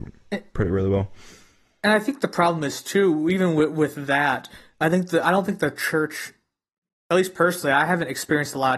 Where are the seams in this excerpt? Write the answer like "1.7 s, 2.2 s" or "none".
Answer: none